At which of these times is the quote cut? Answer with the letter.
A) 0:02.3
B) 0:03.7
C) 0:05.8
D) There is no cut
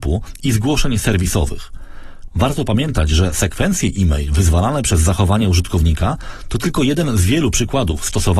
A